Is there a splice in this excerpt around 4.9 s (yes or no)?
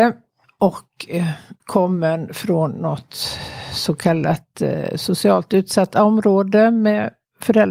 no